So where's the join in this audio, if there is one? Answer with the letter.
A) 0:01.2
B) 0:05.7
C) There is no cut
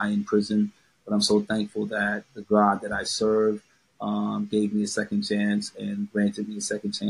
B